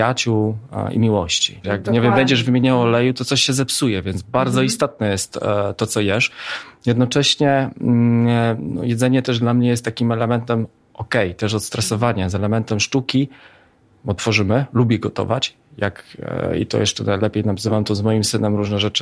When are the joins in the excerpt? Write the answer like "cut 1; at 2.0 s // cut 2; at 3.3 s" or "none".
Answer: cut 1; at 1.6 s

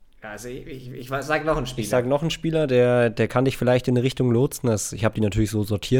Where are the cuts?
none

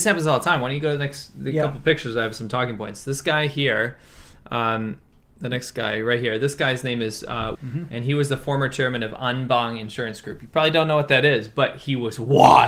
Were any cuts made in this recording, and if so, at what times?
cut 1; at 7.5 s

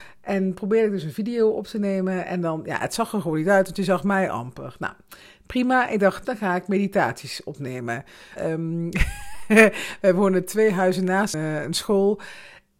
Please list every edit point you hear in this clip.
cut 1; at 6.2 s // cut 2; at 8.4 s // cut 3; at 11.3 s

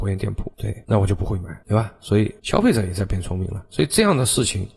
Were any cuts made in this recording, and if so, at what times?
none

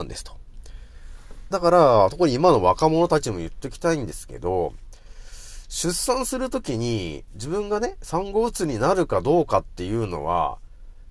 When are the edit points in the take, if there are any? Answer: cut 1; at 1.5 s // cut 2; at 7.3 s

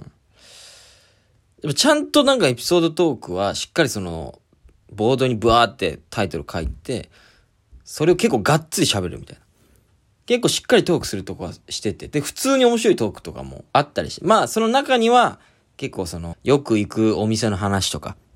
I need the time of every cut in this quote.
cut 1; at 10.2 s // cut 2; at 13.7 s // cut 3; at 16.3 s

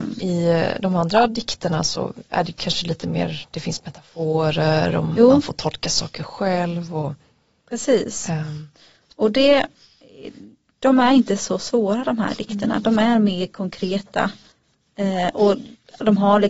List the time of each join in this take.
none

